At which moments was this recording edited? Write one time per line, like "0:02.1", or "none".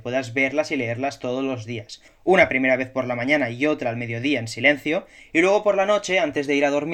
none

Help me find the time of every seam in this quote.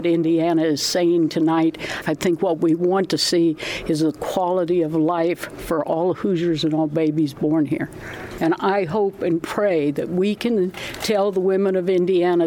0:02.0
0:08.4

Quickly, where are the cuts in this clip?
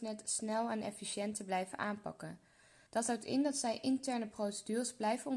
none

